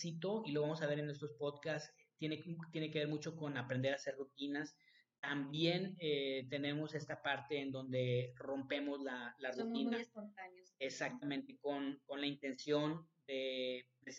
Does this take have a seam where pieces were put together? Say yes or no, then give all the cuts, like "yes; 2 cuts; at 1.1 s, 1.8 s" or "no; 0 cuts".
no; 0 cuts